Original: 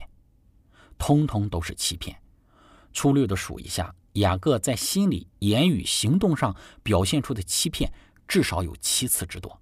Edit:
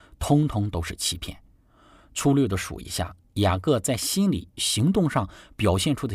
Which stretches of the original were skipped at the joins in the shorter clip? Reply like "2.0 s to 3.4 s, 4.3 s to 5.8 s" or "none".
5.4 s to 5.8 s